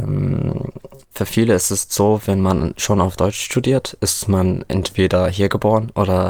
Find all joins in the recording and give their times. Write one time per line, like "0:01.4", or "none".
0:01.0